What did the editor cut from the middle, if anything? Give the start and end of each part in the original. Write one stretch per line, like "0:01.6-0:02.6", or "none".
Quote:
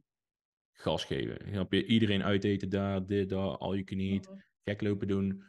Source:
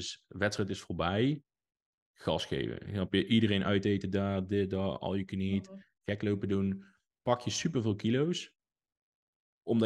none